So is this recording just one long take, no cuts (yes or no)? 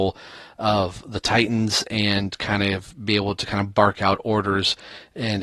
yes